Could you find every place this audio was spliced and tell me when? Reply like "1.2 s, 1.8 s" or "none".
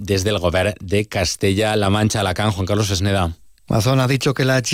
none